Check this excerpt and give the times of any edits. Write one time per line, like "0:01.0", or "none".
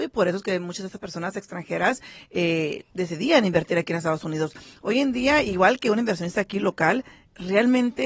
0:02.9